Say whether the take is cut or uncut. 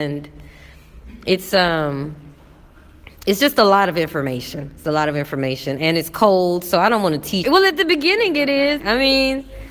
cut